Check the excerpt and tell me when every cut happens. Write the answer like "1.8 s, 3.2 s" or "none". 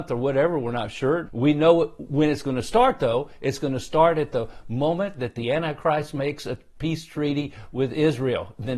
1.2 s